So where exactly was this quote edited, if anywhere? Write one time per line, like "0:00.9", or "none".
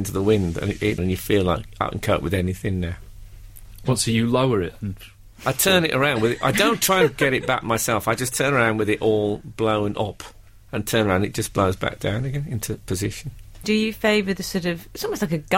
0:01.0
0:13.6